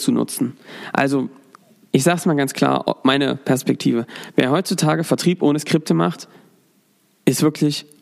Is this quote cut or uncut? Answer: uncut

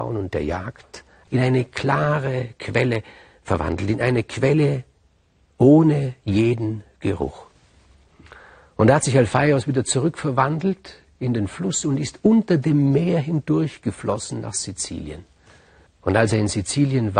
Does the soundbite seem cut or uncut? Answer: cut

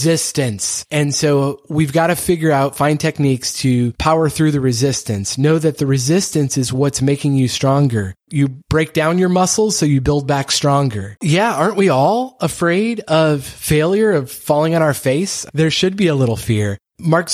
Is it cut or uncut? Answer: cut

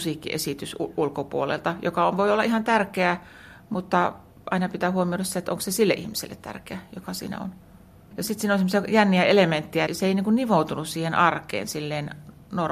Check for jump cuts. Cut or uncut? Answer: cut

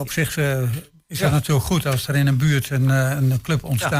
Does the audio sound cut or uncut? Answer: uncut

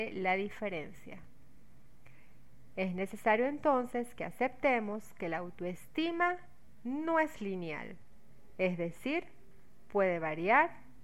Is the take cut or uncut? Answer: uncut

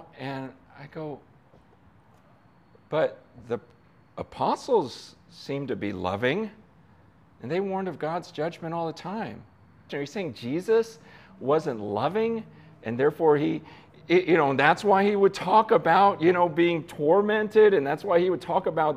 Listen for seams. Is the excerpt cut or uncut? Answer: cut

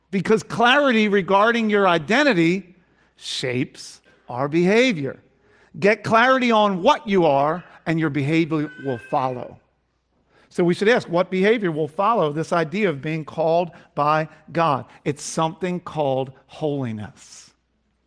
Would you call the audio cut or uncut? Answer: uncut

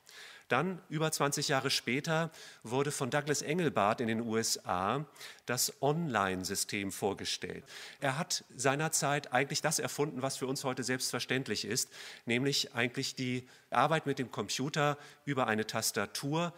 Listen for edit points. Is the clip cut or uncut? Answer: uncut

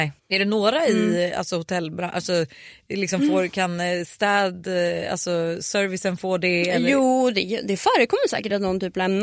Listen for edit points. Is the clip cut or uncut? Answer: uncut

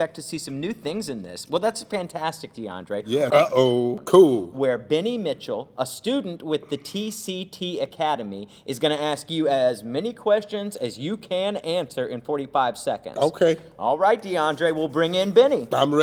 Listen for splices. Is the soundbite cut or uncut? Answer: cut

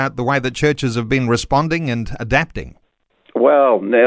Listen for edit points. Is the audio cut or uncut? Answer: uncut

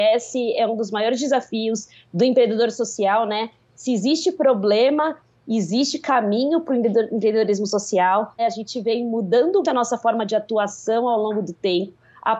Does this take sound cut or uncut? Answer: cut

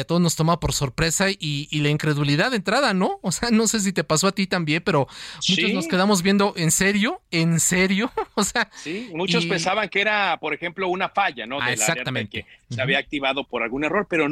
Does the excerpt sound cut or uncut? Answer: uncut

